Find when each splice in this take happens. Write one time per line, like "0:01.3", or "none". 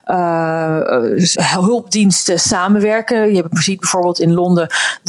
0:01.3